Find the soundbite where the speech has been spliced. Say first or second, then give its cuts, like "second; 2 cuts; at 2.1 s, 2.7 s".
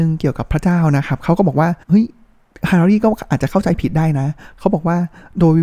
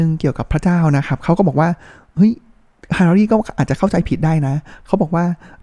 first; 1 cut; at 1.8 s